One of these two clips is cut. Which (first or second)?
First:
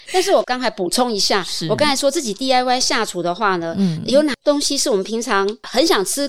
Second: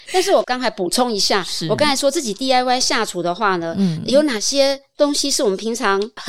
first